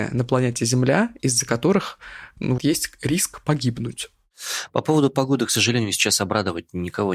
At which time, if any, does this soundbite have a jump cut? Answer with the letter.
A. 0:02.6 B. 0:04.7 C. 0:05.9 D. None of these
A